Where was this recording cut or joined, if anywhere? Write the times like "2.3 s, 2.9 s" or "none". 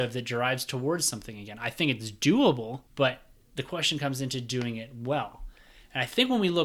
2.9 s